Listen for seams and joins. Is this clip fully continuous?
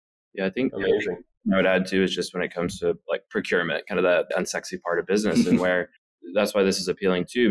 no; 2 cuts; at 4.3 s, 6.0 s

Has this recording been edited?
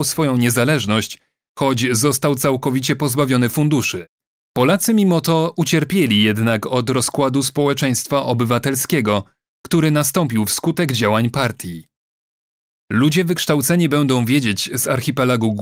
yes; 1 cut; at 4.3 s

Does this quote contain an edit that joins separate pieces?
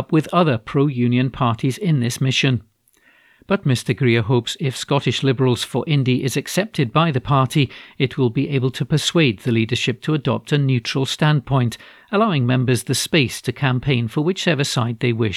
no; 0 cuts

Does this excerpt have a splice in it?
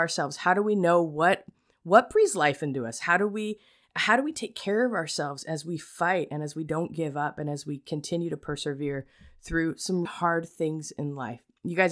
yes; 2 cuts; at 3.0 s, 10.1 s

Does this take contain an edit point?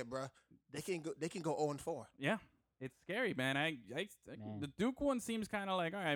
no; 0 cuts

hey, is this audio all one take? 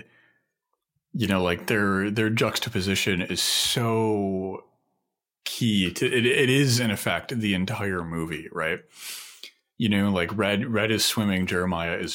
yes; 0 cuts

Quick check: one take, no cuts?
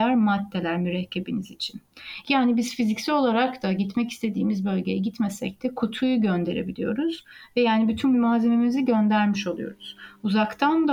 no; 1 cut; at 8.1 s

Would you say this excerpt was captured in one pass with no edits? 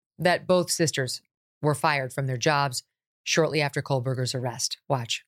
yes; 0 cuts

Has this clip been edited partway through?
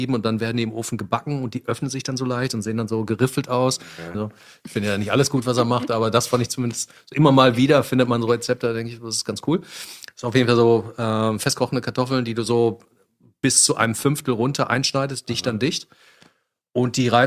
yes; 1 cut; at 4.1 s

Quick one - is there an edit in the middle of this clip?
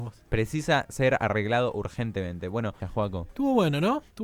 yes; 1 cut; at 2.8 s

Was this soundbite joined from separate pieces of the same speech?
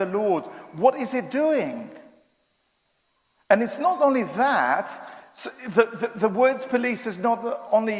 no; 0 cuts

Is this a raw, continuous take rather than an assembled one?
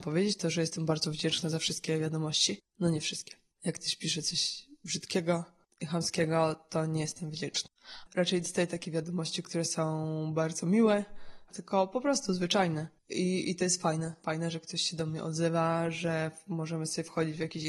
no; 2 cuts; at 8.1 s, 11.5 s

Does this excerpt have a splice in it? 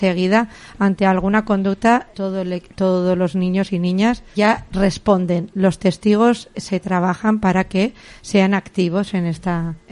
yes; 2 cuts; at 2.1 s, 4.3 s

